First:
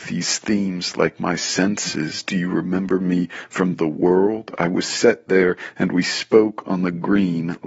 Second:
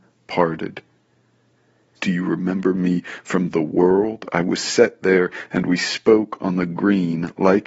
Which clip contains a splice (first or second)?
second